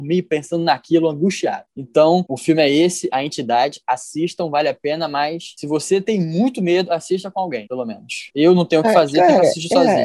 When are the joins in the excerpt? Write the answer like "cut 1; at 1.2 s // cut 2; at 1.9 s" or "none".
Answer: none